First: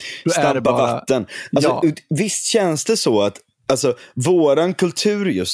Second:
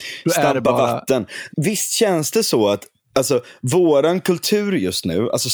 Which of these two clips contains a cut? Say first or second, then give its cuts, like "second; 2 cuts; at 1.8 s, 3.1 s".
second; 1 cut; at 1.5 s